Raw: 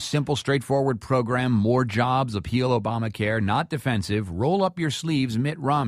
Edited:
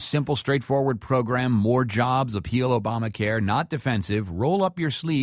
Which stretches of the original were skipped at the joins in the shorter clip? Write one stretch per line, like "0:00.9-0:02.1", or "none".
none

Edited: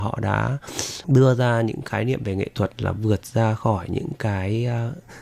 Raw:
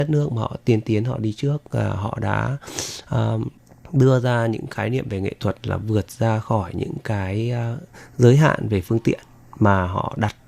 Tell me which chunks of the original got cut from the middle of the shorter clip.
0:03.0-0:03.9

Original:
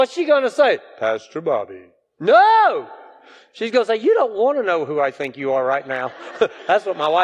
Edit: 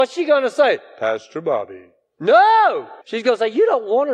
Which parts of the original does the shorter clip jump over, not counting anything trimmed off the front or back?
0:03.0-0:03.5

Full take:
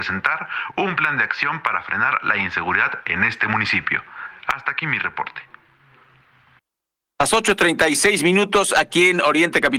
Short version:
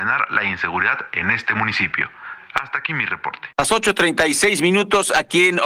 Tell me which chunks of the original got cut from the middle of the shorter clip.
0:05.5-0:07.1

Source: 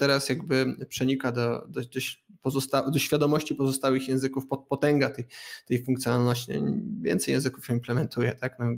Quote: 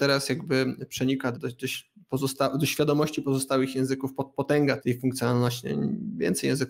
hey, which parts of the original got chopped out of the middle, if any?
0:01.3-0:01.7
0:05.1-0:05.6

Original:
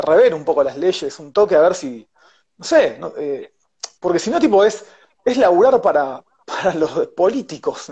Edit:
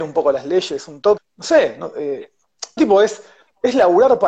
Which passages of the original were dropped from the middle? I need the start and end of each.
0:01.5-0:02.4
0:04.0-0:04.4

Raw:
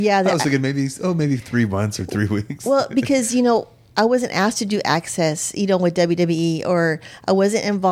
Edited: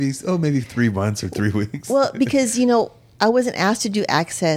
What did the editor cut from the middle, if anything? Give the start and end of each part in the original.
none

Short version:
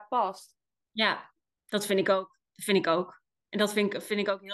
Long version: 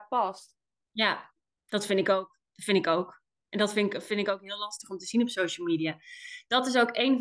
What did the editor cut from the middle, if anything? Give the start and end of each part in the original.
none

